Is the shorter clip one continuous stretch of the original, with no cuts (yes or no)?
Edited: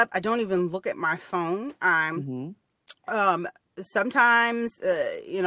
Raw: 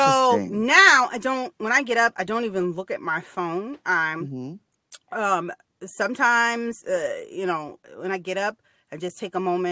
yes